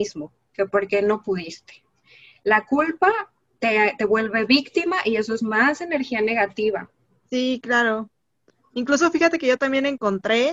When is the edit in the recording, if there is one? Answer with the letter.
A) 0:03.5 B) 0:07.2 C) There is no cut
B